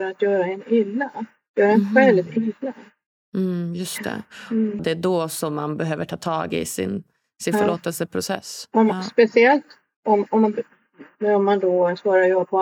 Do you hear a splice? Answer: yes; 1 cut; at 4.8 s

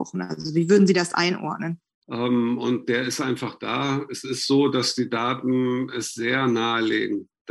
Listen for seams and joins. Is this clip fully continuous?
no; 1 cut; at 2.0 s

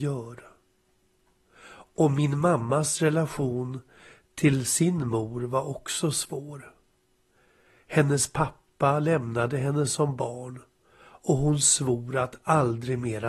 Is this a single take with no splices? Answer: yes; 0 cuts

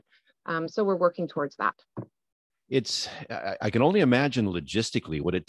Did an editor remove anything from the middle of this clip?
no; 0 cuts

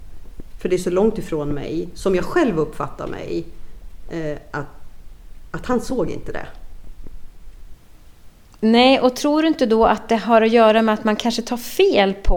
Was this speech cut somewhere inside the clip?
no; 0 cuts

